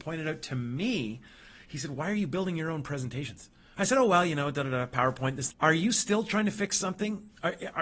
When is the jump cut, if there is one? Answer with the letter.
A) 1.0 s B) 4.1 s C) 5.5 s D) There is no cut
C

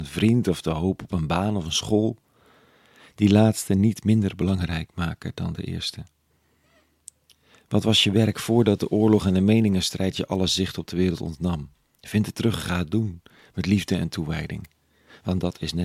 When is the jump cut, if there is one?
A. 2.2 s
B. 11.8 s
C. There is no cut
C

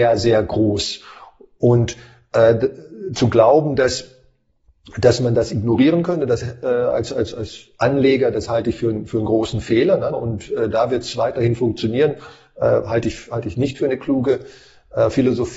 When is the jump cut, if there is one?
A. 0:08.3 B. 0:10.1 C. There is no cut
B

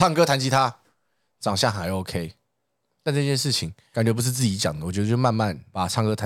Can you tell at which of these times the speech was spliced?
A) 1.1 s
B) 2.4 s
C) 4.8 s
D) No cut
D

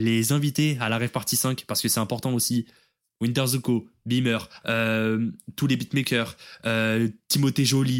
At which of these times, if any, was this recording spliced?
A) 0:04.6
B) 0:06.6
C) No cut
A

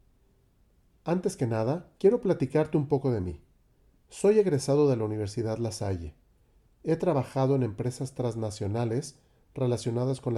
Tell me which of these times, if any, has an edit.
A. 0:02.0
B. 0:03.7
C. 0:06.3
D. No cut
A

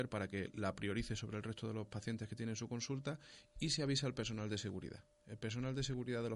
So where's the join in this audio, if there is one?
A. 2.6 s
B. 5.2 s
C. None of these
C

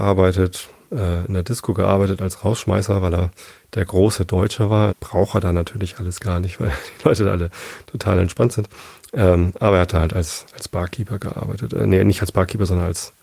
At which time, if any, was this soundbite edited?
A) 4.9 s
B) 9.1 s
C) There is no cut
A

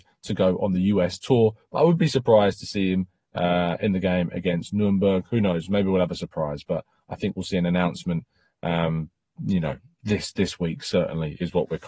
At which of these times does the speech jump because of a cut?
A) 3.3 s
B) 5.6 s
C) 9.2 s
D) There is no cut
D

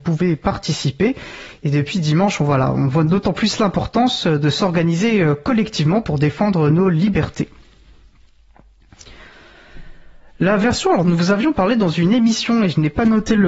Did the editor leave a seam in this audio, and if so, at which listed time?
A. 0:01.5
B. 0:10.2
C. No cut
C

